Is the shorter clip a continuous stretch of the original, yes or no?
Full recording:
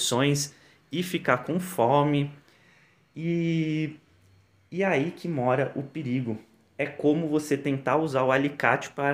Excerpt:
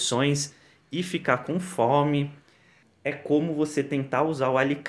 no